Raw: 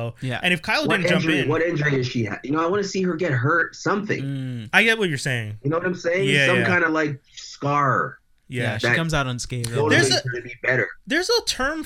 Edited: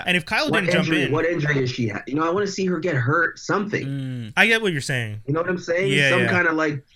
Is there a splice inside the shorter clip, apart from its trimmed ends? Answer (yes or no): no